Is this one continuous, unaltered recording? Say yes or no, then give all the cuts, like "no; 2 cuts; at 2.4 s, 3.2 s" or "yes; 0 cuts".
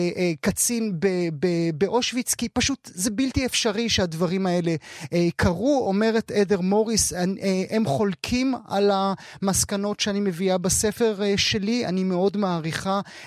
yes; 0 cuts